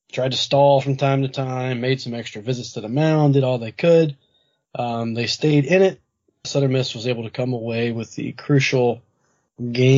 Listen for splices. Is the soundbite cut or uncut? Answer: cut